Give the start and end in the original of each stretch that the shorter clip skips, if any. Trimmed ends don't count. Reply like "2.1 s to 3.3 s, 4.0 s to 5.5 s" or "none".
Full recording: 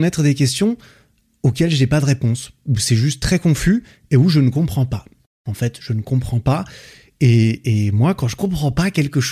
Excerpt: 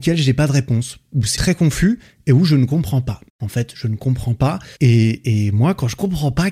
2.9 s to 3.2 s, 5.1 s to 5.3 s, 6.8 s to 7.2 s